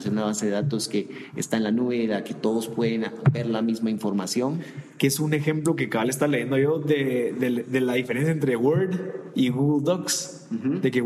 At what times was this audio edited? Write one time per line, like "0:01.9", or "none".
none